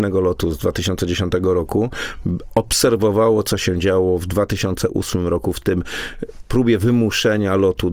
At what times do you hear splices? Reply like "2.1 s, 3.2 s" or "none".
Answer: none

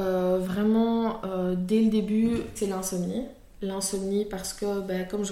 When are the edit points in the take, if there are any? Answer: 2.6 s

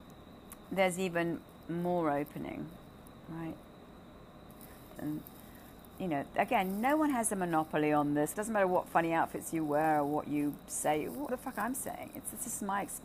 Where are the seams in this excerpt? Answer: 5.0 s, 8.3 s, 11.3 s

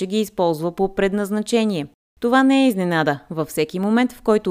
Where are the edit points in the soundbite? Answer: none

